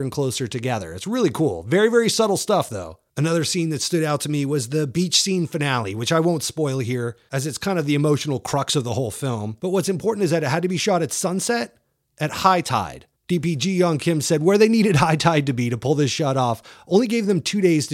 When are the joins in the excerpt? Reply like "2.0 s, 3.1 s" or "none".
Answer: 13.2 s